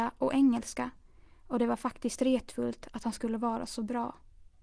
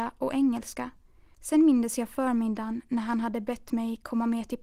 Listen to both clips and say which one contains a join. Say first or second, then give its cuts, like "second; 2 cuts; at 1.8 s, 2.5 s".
second; 1 cut; at 1.3 s